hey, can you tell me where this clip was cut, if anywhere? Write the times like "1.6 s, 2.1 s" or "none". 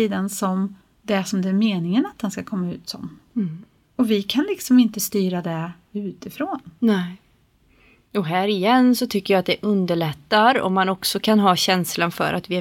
none